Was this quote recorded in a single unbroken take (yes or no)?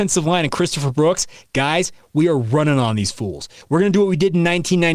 yes